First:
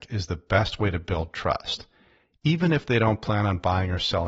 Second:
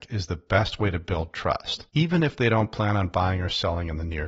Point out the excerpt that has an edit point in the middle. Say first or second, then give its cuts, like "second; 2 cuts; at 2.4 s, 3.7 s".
second; 1 cut; at 1.9 s